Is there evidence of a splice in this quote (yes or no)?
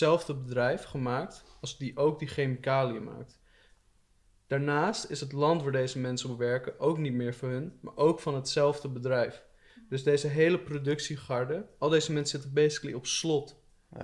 no